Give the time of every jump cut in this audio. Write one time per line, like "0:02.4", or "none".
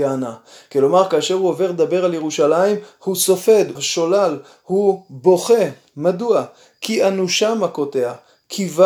0:03.7